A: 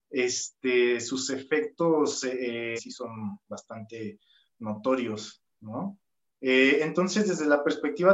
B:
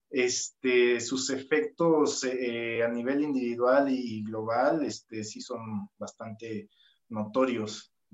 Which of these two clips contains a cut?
A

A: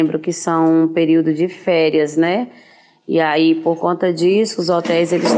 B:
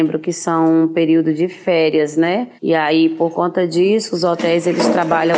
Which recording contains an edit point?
B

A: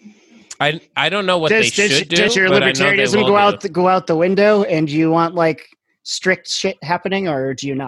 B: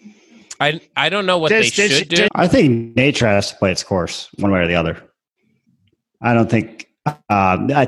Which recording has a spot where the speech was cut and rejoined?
B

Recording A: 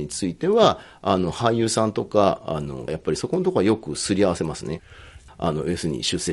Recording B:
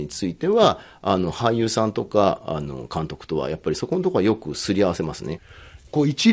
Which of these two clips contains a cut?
A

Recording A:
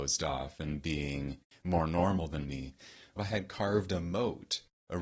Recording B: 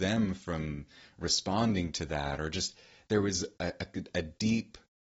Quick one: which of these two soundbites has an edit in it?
A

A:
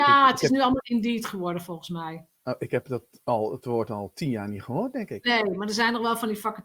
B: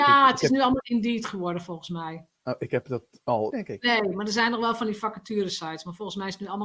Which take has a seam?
B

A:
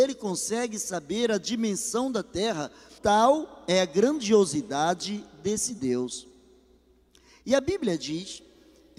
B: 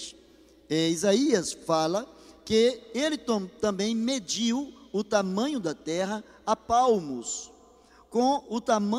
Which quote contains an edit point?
A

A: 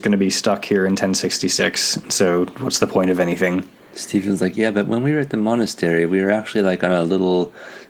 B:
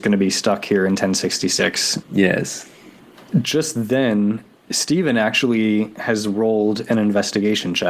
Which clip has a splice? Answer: B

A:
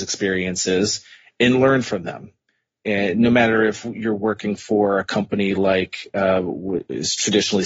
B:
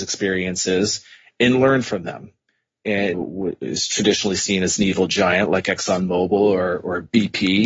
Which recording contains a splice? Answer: B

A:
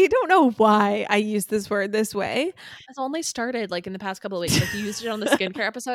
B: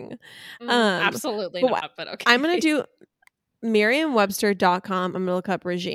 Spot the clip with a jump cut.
A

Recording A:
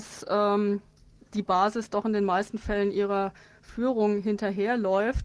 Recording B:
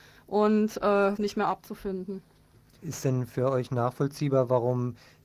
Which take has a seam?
B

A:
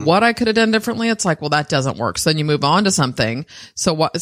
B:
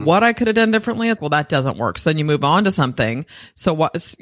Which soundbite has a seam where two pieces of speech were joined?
B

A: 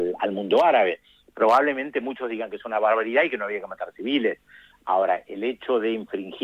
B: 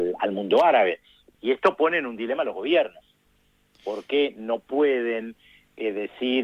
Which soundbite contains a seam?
B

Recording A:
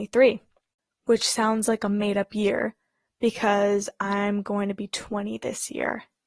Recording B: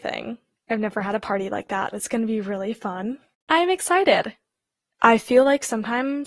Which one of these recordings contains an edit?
B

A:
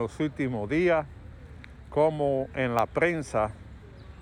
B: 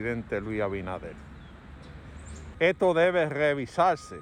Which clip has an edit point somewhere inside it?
B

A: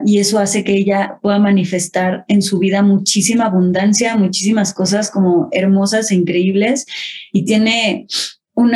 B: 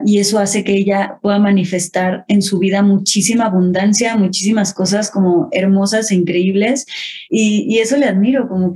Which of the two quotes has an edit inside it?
B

